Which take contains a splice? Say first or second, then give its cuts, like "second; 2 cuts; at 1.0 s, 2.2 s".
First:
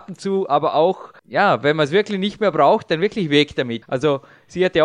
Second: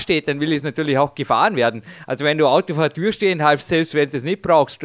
first; 2 cuts; at 1.2 s, 3.8 s